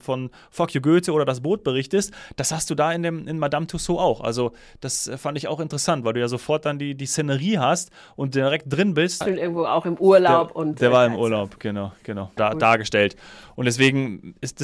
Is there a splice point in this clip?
yes; 2 cuts; at 9.2 s, 12.4 s

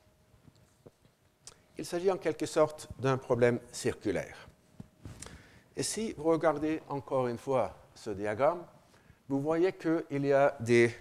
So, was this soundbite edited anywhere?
no; 0 cuts

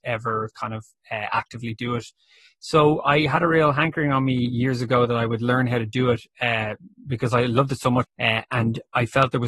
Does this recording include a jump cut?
yes; 1 cut; at 8.0 s

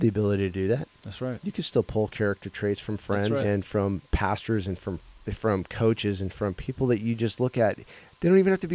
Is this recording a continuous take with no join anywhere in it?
no; 1 cut; at 3.4 s

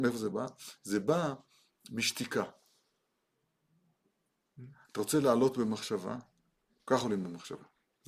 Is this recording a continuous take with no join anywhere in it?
no; 1 cut; at 6.8 s

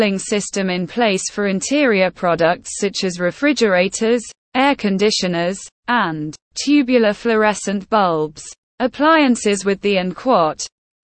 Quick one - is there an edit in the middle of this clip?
yes; 1 cut; at 6.4 s

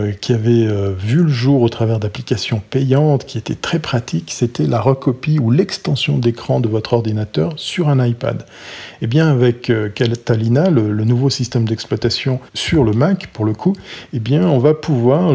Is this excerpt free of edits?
no; 1 cut; at 12.5 s

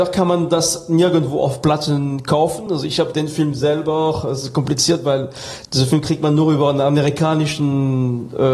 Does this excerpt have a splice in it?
no; 0 cuts

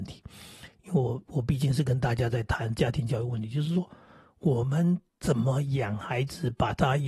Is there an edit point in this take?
yes; 1 cut; at 5.1 s

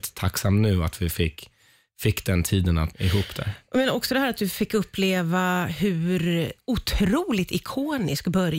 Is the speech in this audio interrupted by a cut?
yes; 1 cut; at 2.9 s

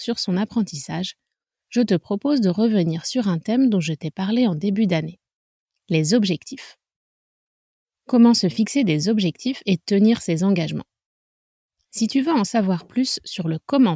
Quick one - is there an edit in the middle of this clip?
no; 0 cuts

